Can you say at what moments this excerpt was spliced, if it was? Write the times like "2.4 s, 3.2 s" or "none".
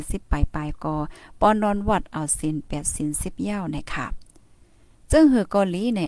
none